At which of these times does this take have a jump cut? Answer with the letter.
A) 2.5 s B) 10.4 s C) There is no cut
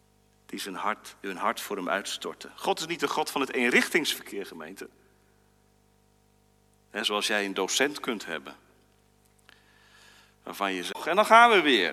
C